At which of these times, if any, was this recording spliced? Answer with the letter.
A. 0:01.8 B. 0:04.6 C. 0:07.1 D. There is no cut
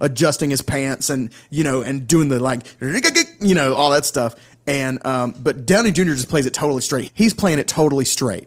C